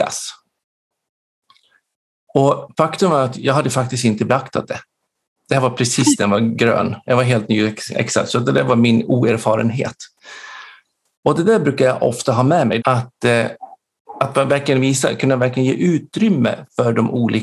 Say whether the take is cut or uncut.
cut